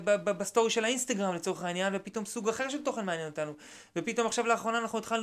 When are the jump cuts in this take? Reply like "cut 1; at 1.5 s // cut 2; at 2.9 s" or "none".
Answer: none